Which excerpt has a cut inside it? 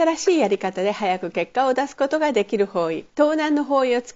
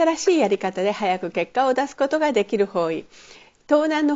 first; 1 cut; at 3.1 s

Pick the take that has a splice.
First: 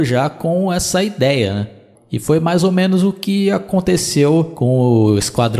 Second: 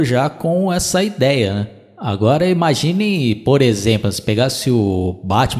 first; 1 cut; at 1.9 s

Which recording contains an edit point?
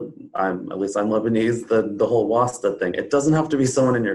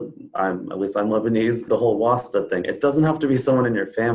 second; 1 cut; at 1.7 s

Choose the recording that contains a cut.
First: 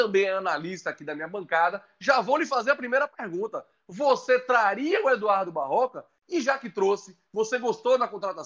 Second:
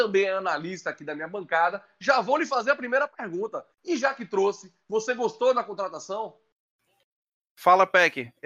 second; 1 cut; at 3.7 s

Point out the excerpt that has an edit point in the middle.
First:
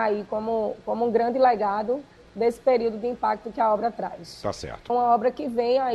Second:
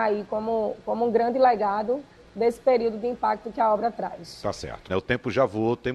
first; 1 cut; at 4.9 s

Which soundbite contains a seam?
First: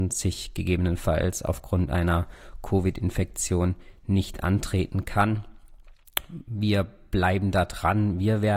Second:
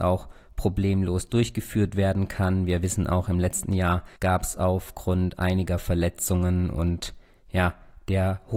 second; 1 cut; at 4.2 s

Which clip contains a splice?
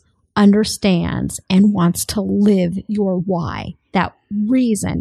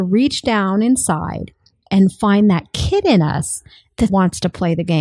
second; 1 cut; at 4.1 s

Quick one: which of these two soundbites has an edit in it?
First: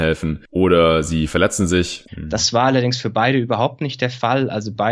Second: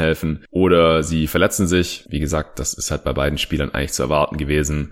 first; 1 cut; at 2.1 s

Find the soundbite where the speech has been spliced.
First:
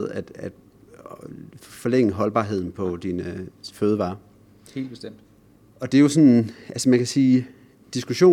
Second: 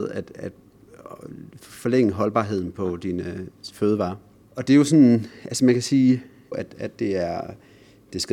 second; 2 cuts; at 4.4 s, 6.5 s

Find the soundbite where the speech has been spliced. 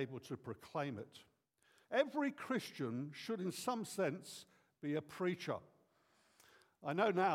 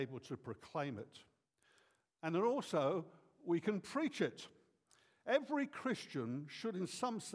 first; 1 cut; at 1.8 s

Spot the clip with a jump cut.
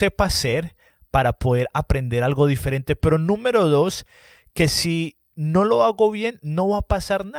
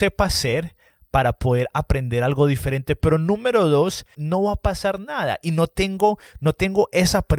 second; 1 cut; at 4.1 s

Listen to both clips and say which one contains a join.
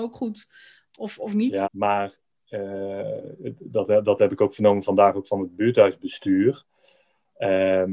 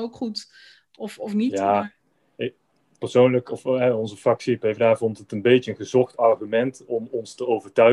first; 1 cut; at 1.6 s

